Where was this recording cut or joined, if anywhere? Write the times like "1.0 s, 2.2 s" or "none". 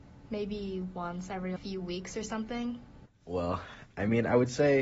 1.6 s, 3.1 s